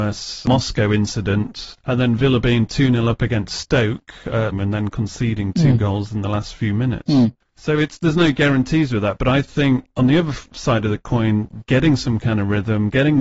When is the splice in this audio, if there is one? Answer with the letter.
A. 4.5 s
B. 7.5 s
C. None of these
A